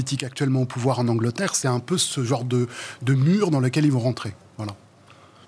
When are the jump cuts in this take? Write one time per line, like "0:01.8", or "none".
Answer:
none